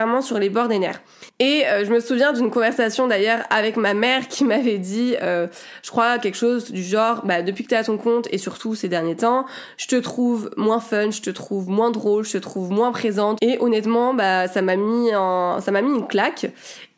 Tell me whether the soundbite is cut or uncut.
cut